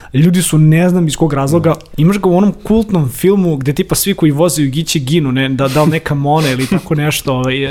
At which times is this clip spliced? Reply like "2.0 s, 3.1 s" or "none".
1.9 s